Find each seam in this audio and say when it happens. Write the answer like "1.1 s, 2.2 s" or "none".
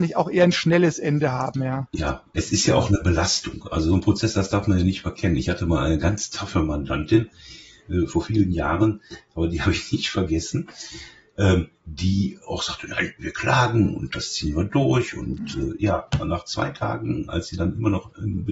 none

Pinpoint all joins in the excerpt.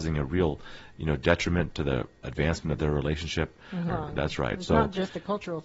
3.9 s

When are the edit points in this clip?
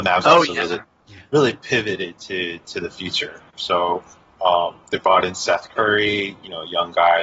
none

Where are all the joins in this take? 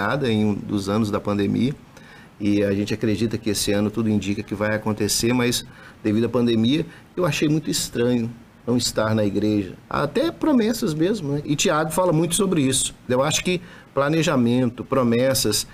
9.9 s, 11.4 s, 13.1 s

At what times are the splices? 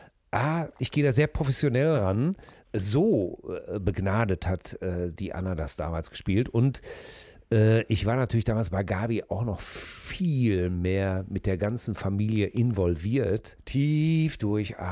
2.5 s, 13.6 s

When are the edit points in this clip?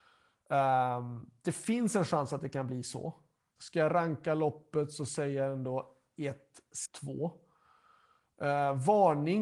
3.6 s, 6.9 s

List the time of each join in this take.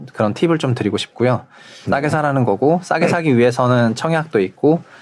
1.8 s

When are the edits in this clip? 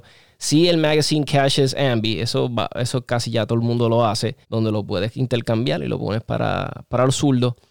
4.4 s

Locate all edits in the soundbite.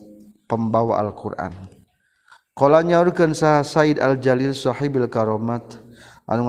none

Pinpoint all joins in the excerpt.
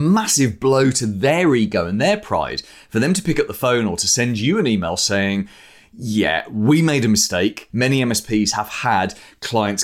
7.7 s

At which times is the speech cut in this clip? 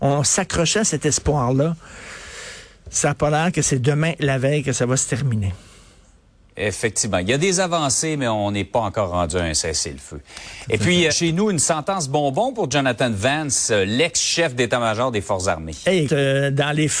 11.1 s, 16.1 s

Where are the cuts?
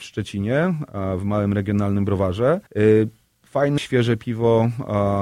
2.7 s, 3.8 s

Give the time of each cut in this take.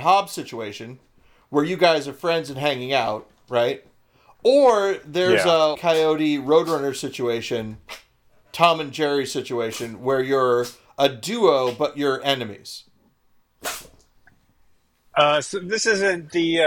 5.7 s

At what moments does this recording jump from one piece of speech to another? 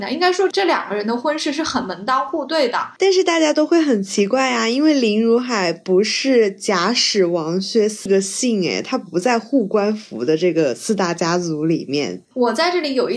none

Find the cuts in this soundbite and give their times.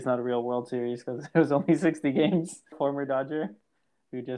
2.7 s

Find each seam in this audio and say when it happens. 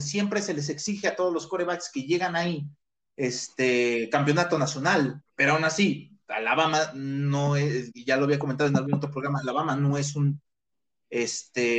5.2 s

